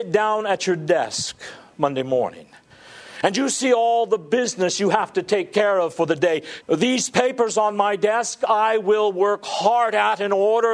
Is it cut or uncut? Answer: cut